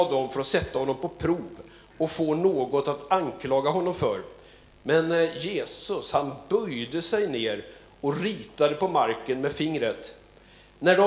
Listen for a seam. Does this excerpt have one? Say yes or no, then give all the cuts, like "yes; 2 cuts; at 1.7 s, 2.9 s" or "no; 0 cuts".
no; 0 cuts